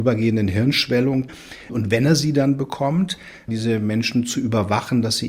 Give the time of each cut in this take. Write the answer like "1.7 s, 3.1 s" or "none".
1.7 s, 3.5 s